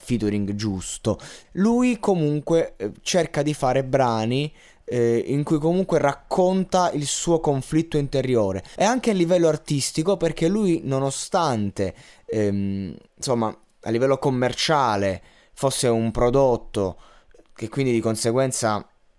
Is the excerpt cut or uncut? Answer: cut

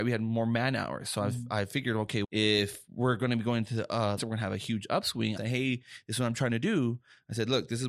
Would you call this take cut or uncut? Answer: cut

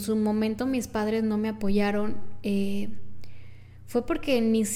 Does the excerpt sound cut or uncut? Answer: uncut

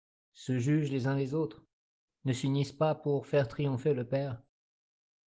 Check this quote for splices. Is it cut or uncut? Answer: cut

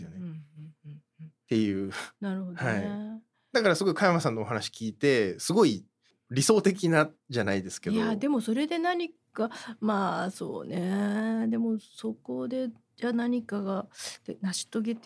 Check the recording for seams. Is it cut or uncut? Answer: uncut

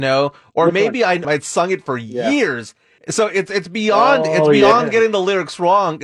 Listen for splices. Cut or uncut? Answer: cut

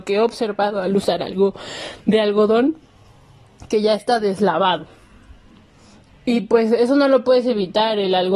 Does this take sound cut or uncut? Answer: uncut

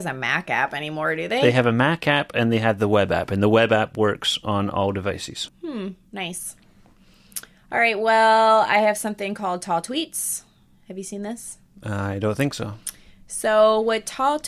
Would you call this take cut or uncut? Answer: cut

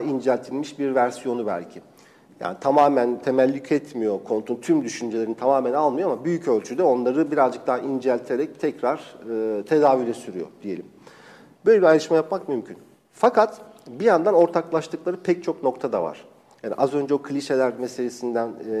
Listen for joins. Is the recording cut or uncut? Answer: uncut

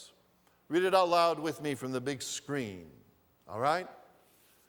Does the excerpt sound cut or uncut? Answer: uncut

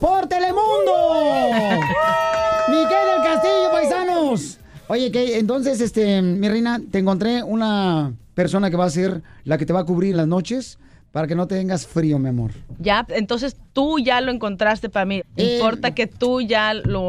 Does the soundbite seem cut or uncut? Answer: cut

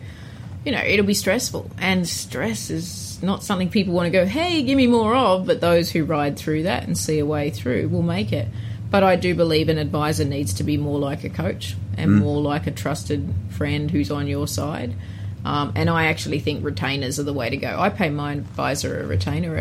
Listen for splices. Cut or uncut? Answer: uncut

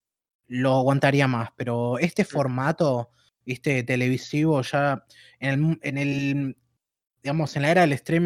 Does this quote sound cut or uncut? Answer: uncut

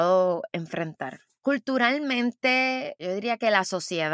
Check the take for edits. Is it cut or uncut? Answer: cut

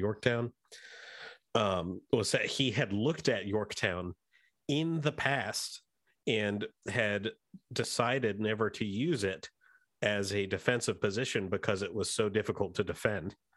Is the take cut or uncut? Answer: uncut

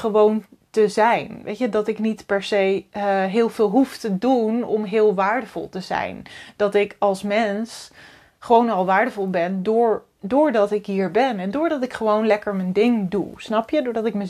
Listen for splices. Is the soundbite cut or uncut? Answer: uncut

